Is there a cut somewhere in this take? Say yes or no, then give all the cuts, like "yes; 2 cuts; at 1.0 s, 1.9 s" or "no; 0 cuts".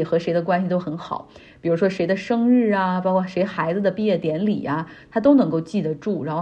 no; 0 cuts